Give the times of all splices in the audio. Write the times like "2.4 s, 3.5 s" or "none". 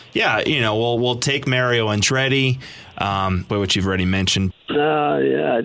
3.5 s, 4.5 s